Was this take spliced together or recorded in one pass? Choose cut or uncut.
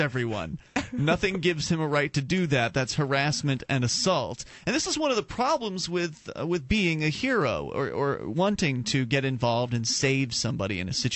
uncut